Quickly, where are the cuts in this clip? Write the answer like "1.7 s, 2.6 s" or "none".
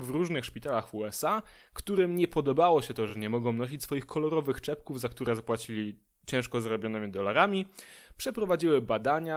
none